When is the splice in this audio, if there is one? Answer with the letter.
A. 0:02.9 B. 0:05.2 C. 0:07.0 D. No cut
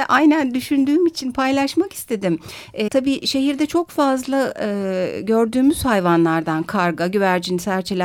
A